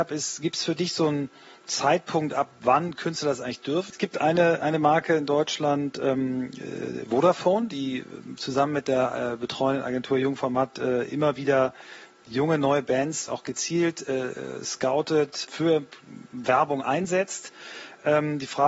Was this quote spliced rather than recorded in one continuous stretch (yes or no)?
yes